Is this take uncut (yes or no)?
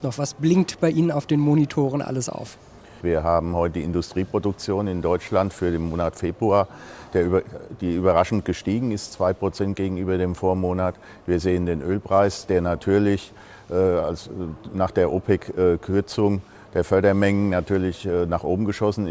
no